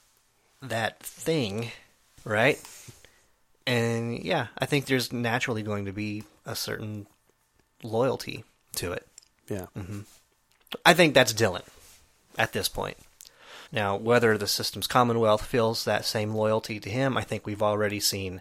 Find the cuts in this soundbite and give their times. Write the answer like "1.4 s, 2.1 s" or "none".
13.7 s